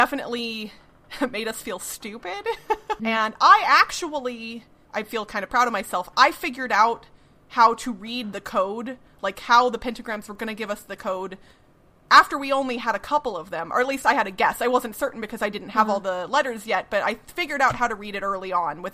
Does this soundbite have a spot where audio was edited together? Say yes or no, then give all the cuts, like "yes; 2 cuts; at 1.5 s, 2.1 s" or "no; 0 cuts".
yes; 1 cut; at 3.0 s